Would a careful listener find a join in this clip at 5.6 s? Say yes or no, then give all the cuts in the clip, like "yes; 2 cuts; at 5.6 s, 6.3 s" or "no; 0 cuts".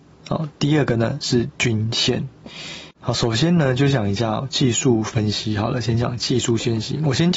no; 1 cut; at 2.9 s